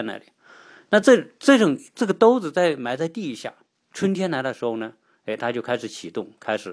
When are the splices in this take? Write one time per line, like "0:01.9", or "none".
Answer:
none